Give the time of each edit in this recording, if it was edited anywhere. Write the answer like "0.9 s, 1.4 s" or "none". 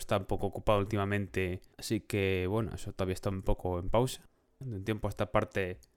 4.6 s